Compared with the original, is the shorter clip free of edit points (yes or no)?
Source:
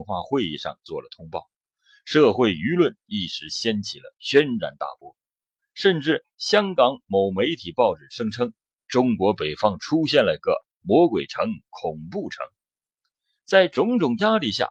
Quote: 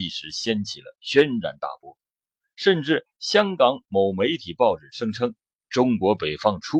yes